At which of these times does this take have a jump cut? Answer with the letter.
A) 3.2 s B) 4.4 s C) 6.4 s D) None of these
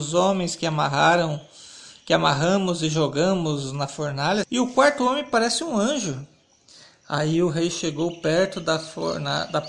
B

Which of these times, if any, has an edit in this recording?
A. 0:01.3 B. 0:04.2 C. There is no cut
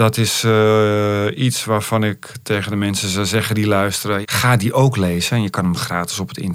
B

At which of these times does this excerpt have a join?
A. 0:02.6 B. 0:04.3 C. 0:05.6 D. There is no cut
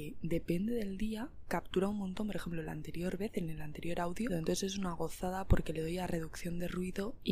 B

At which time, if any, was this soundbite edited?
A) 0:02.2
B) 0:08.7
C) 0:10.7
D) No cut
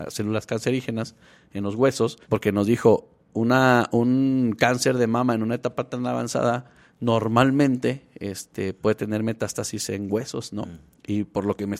A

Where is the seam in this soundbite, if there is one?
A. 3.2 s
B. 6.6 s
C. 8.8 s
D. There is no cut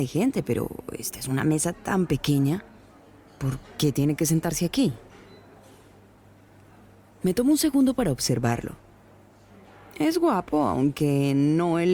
D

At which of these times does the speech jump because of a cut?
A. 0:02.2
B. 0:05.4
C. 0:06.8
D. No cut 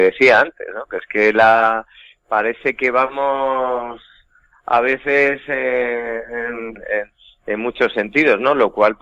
C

